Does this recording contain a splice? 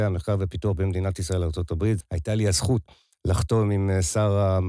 yes; 1 cut; at 2.0 s

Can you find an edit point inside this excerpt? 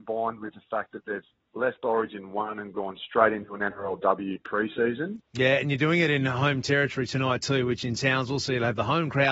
yes; 1 cut; at 5.2 s

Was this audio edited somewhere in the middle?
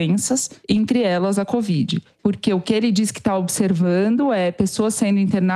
yes; 1 cut; at 2.2 s

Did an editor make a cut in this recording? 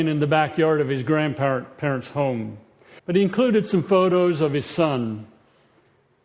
yes; 1 cut; at 3.0 s

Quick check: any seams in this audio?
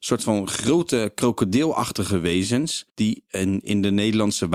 yes; 1 cut; at 2.9 s

